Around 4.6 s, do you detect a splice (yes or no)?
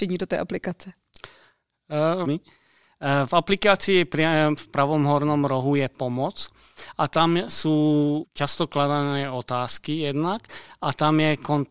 yes